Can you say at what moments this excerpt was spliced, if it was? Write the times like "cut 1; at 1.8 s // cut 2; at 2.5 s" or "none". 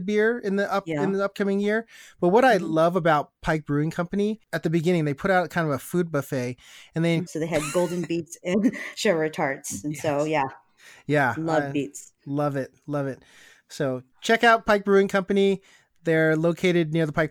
cut 1; at 7.3 s